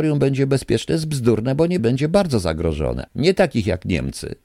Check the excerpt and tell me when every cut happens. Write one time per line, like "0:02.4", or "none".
0:01.8
0:03.1